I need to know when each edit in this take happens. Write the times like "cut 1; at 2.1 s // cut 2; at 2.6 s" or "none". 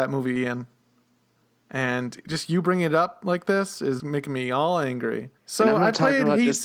cut 1; at 4.0 s // cut 2; at 5.4 s